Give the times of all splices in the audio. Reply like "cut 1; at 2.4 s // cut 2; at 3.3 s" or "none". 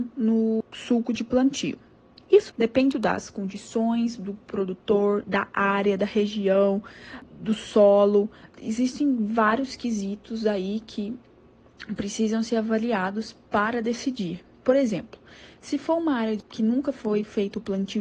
cut 1; at 2.9 s